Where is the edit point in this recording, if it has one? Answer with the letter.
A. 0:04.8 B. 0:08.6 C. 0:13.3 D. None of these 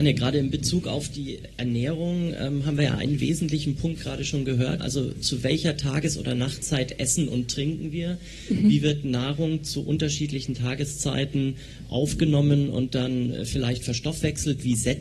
A